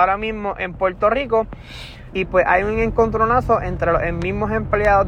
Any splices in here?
yes; 1 cut; at 2.1 s

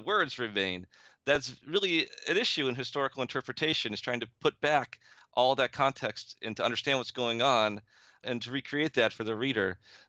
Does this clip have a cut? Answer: no; 0 cuts

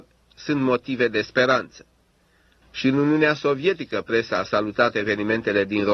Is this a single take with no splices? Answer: no; 1 cut; at 2.6 s

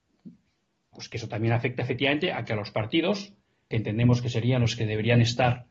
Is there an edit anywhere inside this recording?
yes; 2 cuts; at 0.9 s, 3.7 s

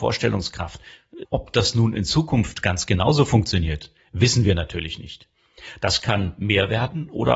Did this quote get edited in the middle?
yes; 1 cut; at 1.2 s

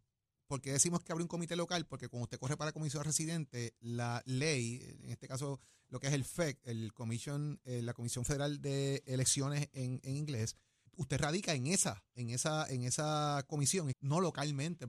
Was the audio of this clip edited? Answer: yes; 2 cuts; at 10.9 s, 13.9 s

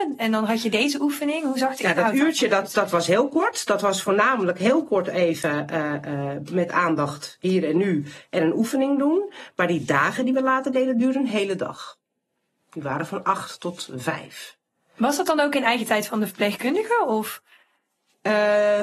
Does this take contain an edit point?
no; 0 cuts

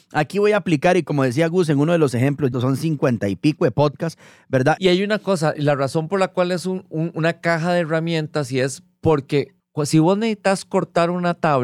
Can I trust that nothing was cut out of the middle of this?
no; 3 cuts; at 2.5 s, 4.8 s, 9.6 s

